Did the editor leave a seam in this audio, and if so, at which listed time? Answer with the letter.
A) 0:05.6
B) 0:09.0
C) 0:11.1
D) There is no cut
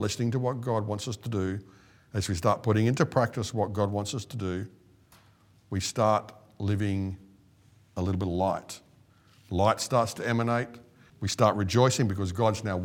C